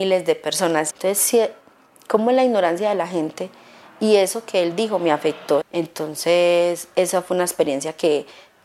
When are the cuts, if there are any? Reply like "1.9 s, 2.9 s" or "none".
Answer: 0.9 s, 5.6 s